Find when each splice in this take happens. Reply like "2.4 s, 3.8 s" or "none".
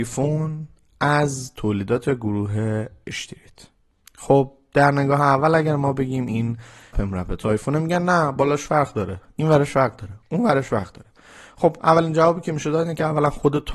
6.9 s